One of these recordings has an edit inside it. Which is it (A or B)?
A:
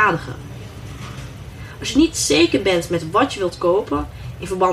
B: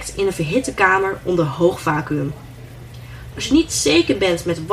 B